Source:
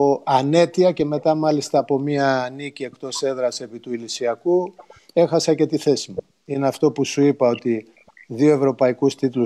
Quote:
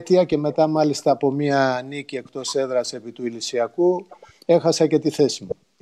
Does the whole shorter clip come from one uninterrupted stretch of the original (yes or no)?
yes